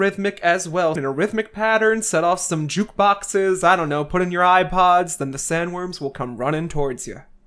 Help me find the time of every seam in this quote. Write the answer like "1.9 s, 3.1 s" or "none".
1.0 s